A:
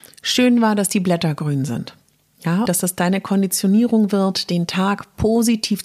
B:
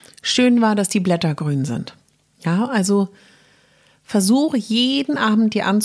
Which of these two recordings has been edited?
A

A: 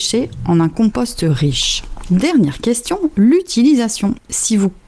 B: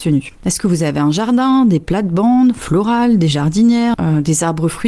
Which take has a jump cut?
B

